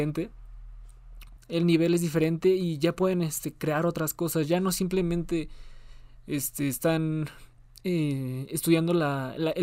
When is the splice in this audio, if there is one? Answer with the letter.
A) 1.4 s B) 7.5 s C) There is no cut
A